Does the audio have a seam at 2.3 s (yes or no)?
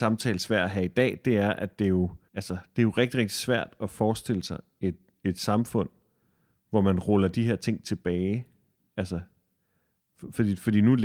yes